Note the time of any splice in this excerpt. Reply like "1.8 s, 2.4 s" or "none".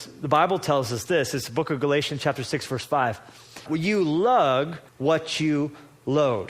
3.7 s, 4.9 s